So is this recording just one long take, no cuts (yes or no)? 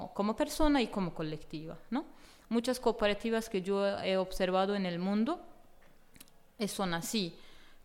yes